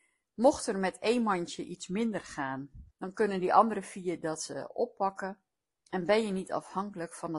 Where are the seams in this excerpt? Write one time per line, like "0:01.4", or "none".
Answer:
0:02.9